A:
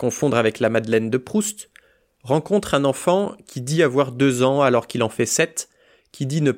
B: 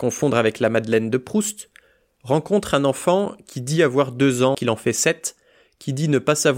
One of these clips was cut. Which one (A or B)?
B